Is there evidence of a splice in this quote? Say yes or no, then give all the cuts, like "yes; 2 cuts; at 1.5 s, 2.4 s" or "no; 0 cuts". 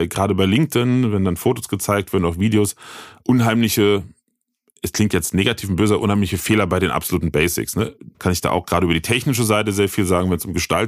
yes; 1 cut; at 8.1 s